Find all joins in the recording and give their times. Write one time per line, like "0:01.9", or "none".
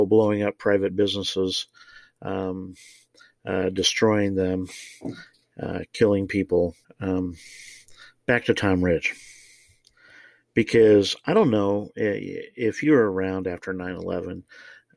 0:06.8